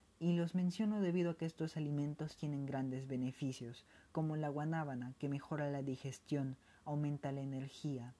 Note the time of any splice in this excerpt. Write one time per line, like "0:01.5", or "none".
none